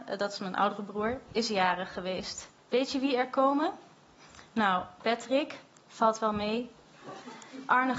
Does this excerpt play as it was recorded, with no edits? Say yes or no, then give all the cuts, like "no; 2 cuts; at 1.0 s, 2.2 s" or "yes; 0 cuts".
no; 1 cut; at 2.6 s